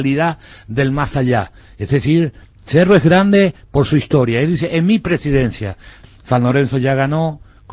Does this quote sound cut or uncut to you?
cut